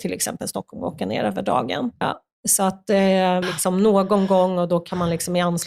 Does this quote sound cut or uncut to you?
cut